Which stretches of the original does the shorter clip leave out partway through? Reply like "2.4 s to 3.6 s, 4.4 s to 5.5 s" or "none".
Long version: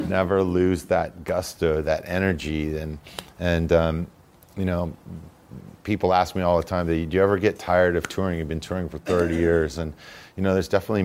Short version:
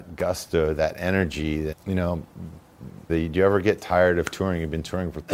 2.8 s to 4.4 s, 5.8 s to 6.9 s